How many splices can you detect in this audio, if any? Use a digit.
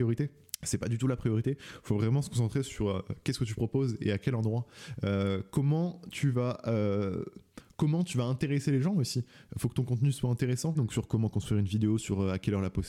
1